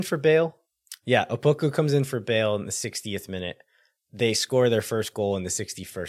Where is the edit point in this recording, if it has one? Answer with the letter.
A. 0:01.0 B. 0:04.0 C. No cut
C